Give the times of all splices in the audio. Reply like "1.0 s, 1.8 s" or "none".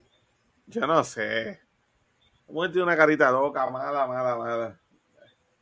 none

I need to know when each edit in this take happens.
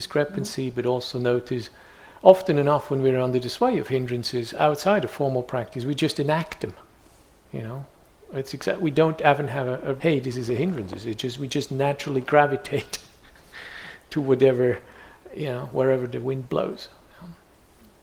10.0 s

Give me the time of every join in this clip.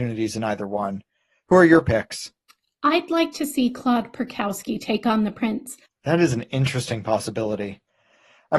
5.8 s

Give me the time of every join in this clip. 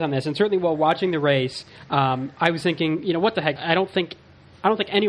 3.6 s

